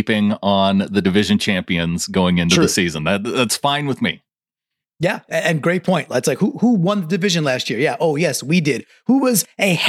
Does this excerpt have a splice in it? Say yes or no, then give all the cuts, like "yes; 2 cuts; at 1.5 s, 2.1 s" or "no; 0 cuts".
no; 0 cuts